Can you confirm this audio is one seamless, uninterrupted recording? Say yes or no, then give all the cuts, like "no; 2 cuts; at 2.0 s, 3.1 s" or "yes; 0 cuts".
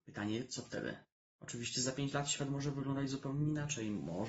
no; 1 cut; at 1.3 s